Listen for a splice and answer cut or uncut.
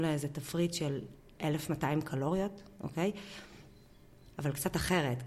cut